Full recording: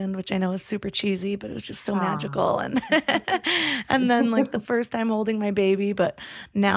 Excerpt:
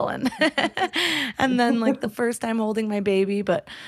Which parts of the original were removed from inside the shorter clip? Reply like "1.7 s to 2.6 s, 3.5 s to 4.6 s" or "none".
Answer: none